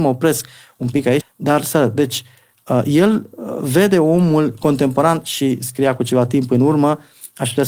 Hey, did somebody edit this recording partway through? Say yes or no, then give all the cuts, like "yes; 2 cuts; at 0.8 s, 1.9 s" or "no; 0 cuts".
yes; 1 cut; at 1.2 s